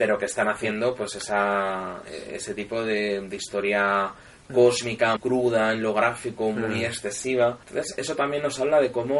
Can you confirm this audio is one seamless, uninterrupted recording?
no; 2 cuts; at 5.2 s, 7.6 s

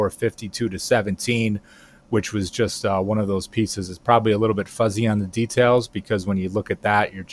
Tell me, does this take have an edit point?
no; 0 cuts

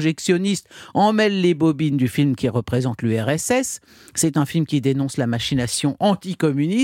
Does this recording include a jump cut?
no; 0 cuts

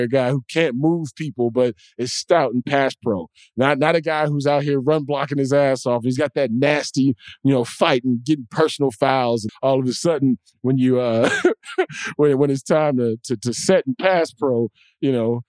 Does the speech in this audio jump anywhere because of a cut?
yes; 1 cut; at 9.5 s

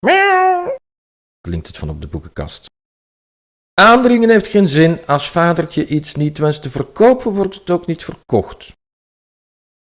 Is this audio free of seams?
yes; 0 cuts

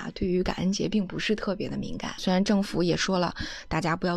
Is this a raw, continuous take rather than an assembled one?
no; 1 cut; at 2.2 s

